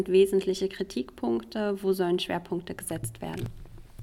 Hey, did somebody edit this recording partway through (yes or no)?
no